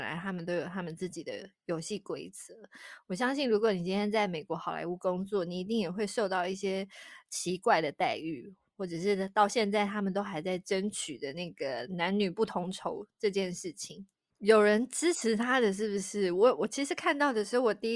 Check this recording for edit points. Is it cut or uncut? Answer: cut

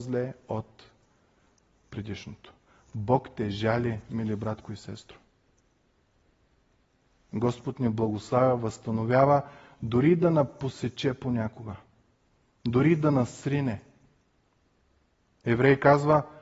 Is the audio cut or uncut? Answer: uncut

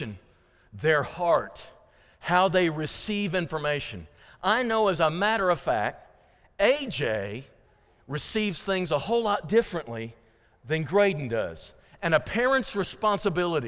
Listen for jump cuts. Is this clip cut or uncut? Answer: uncut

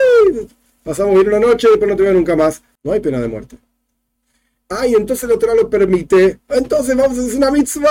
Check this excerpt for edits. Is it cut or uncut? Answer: cut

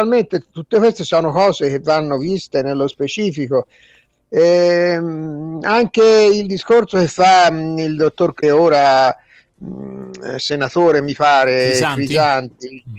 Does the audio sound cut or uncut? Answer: cut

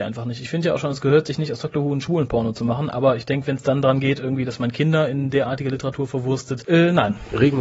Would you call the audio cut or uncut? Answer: uncut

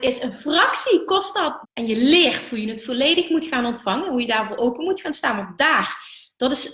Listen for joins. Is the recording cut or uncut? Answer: cut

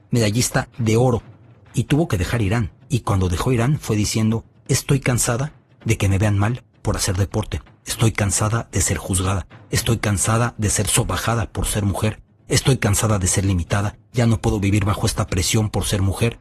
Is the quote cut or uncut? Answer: uncut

